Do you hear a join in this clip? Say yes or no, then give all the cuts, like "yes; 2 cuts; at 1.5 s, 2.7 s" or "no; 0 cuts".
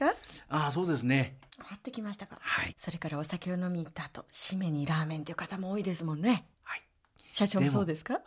yes; 3 cuts; at 1.5 s, 2.7 s, 6.5 s